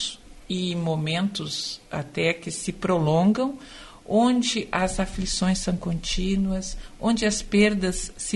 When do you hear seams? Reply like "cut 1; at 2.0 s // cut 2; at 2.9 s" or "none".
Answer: none

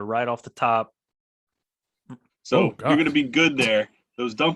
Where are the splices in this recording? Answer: cut 1; at 2.3 s

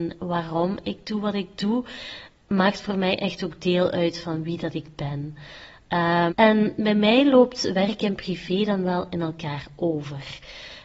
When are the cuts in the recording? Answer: cut 1; at 6.3 s

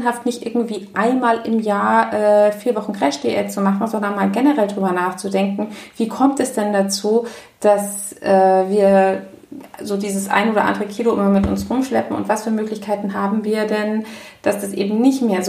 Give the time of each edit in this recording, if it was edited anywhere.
none

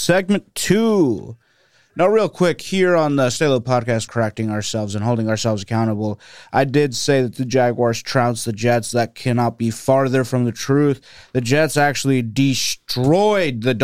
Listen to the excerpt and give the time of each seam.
cut 1; at 4.1 s

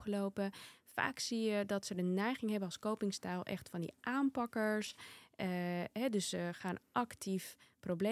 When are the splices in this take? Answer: none

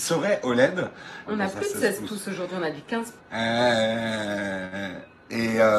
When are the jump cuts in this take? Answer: cut 1; at 1.3 s // cut 2; at 3.2 s

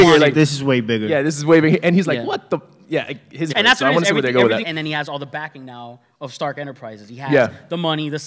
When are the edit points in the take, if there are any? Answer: cut 1; at 3.5 s // cut 2; at 4.6 s

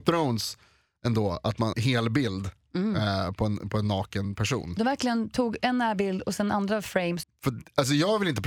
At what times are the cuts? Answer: cut 1; at 1.7 s // cut 2; at 7.2 s

